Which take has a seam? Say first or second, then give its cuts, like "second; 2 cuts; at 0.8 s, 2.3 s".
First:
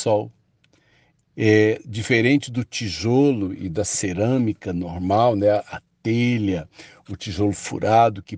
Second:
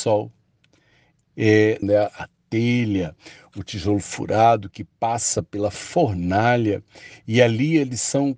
second; 1 cut; at 1.8 s